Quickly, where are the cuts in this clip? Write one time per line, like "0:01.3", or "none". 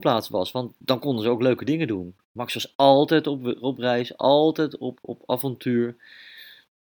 0:04.9